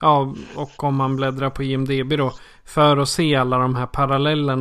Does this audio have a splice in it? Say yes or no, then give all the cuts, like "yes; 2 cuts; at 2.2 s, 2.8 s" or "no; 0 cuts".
no; 0 cuts